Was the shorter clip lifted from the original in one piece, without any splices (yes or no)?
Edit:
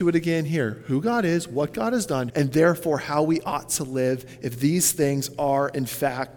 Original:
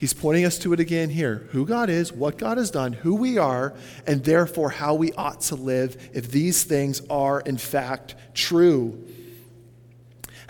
no